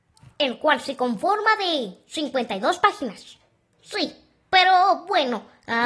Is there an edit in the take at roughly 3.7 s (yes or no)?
yes